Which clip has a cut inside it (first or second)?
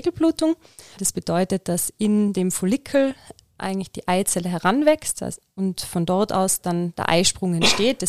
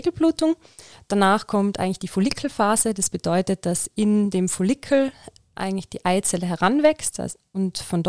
first